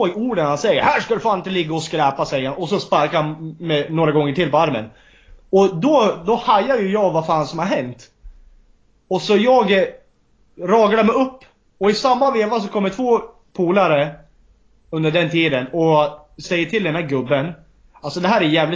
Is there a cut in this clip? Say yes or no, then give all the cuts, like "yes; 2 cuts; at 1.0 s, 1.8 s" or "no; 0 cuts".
no; 0 cuts